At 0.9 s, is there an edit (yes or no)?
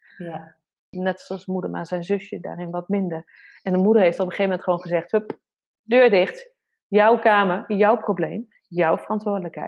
yes